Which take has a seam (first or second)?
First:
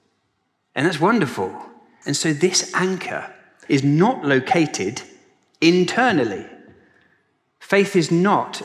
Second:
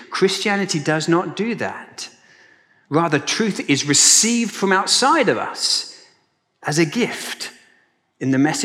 first